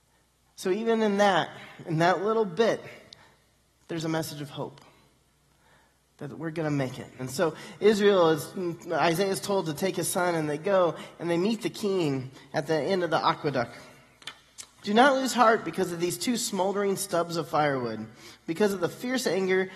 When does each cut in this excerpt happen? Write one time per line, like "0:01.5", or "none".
0:07.2
0:14.8

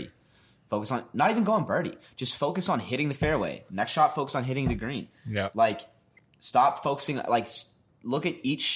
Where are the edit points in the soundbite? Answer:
none

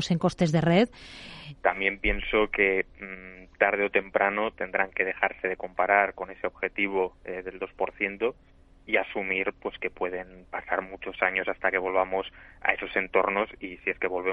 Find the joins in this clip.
0:01.6

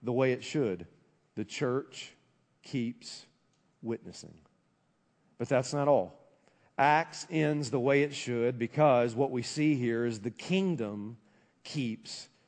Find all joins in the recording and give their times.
none

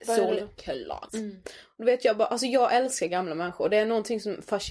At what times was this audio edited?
0:01.1

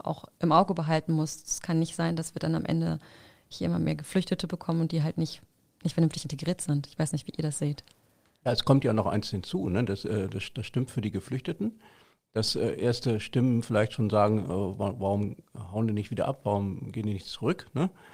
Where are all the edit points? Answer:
none

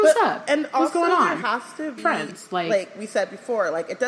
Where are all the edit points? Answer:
0:02.0

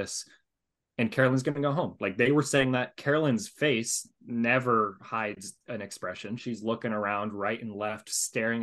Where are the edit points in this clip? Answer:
0:06.4

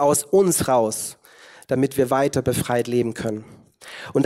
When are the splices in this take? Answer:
none

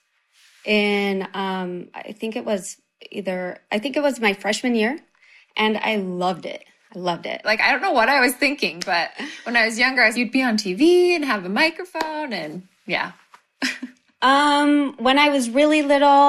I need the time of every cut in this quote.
0:07.4
0:10.1
0:14.1

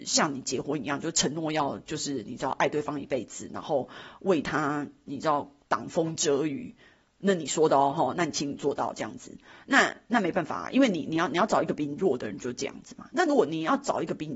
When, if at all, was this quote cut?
none

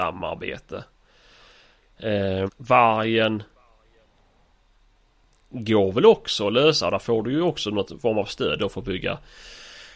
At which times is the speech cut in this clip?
0:02.5

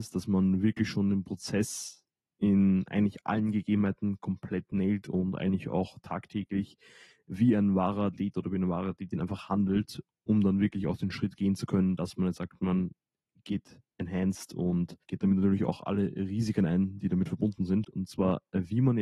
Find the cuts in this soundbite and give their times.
0:15.0
0:17.8

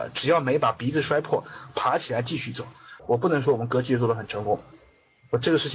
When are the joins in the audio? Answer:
0:03.0

